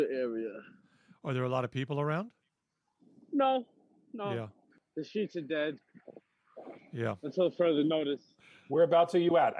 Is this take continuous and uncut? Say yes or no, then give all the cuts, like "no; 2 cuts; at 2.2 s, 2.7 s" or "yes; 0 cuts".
yes; 0 cuts